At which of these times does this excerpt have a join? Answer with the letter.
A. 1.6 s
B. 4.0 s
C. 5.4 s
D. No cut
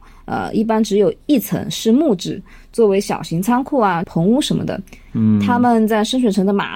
B